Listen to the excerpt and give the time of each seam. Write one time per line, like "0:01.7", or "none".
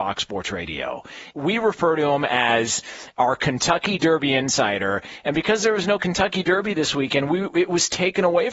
0:01.3